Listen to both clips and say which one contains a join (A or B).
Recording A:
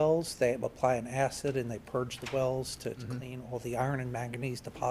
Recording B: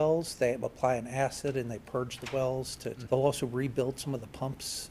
B